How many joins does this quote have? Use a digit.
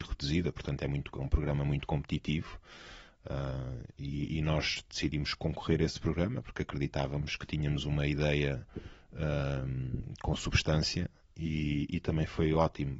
0